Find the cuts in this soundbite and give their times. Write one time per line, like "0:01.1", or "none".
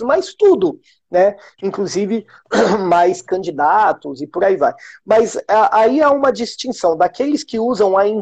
none